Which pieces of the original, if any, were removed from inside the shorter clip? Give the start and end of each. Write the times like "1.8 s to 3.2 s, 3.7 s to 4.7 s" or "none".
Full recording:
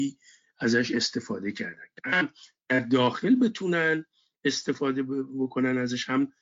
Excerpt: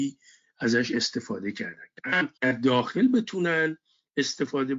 2.3 s to 2.6 s